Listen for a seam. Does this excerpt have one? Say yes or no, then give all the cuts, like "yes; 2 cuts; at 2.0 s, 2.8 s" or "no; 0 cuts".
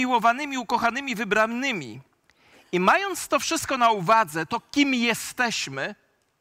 no; 0 cuts